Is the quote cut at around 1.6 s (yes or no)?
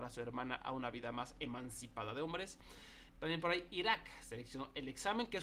no